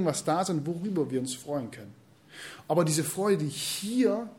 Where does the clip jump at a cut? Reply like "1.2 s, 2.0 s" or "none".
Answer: none